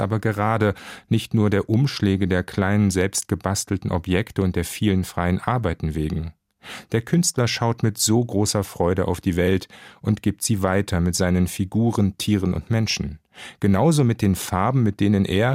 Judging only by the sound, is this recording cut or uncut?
uncut